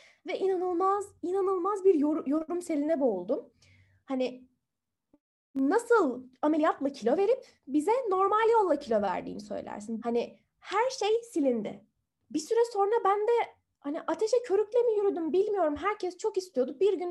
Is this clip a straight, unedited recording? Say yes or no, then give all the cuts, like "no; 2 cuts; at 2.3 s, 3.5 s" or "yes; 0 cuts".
no; 2 cuts; at 10.0 s, 12.2 s